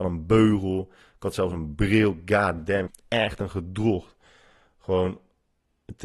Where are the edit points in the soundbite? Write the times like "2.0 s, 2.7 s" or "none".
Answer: 2.9 s